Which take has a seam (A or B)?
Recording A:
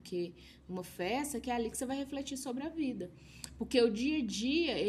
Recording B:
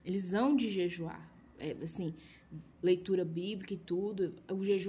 B